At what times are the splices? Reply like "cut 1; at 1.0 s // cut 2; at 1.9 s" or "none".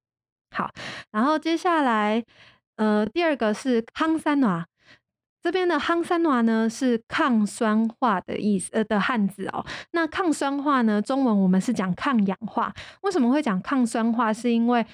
none